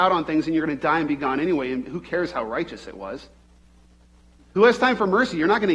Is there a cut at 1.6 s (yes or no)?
no